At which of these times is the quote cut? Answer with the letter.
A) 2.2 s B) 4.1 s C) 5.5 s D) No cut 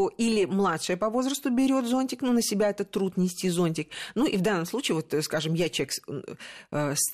D